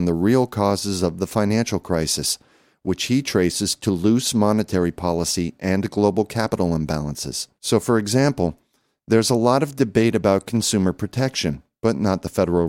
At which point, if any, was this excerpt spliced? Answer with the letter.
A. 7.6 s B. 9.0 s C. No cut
A